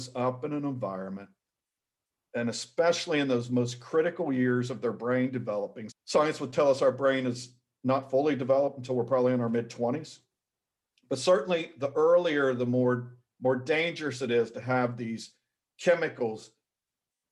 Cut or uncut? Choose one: cut